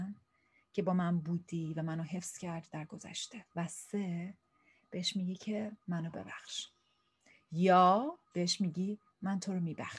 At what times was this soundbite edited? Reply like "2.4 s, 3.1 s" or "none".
3.5 s, 5.8 s, 8.2 s

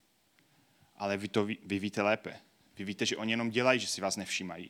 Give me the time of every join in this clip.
none

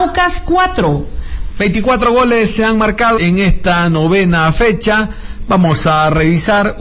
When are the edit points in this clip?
1.5 s, 3.2 s

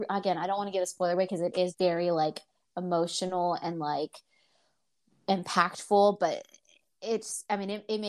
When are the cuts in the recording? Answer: 1.7 s

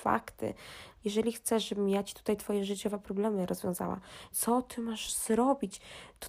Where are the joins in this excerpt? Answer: 1.0 s, 4.3 s

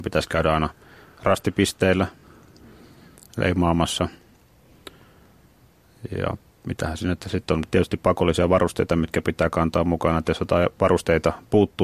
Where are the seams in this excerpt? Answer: none

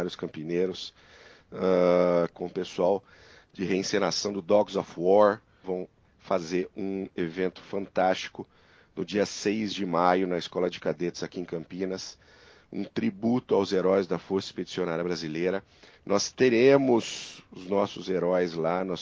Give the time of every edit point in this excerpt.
2.3 s, 5.6 s

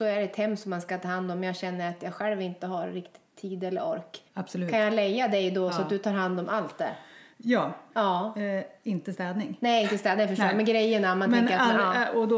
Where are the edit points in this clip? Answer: 4.3 s, 7.9 s

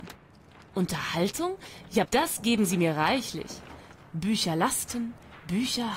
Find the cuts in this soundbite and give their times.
2.1 s, 4.0 s

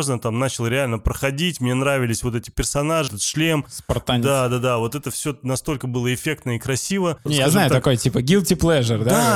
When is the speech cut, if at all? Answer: 3.1 s, 7.3 s

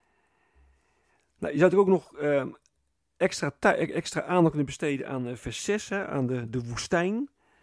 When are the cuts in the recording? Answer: none

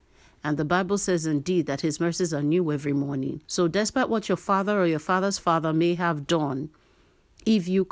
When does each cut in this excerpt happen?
3.4 s

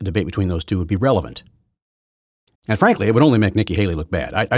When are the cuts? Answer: 2.5 s

